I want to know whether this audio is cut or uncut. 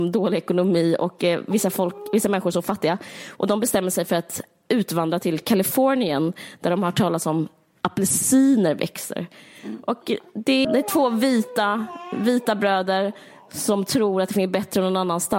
cut